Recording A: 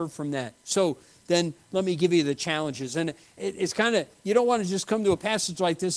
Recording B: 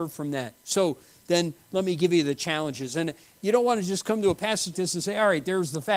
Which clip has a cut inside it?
B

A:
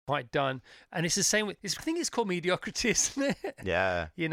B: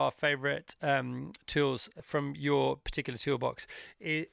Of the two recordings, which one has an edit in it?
A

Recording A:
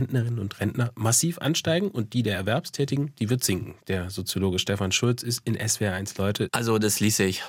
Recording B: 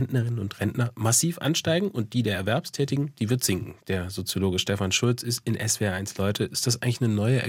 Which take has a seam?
A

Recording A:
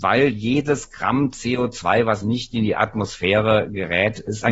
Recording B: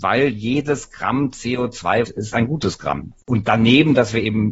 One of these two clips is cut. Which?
B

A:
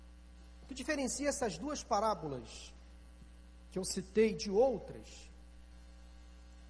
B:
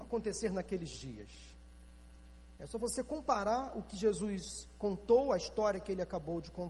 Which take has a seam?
B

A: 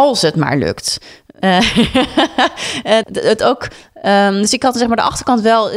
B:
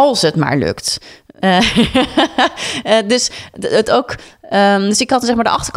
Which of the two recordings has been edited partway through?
A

